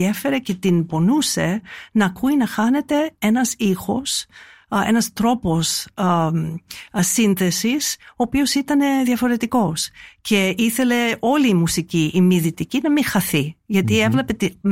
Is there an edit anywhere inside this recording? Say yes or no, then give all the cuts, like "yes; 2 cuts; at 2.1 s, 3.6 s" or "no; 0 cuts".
no; 0 cuts